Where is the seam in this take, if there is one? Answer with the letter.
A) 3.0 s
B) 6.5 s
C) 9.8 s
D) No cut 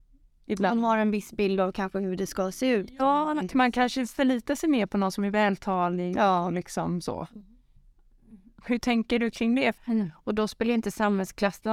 C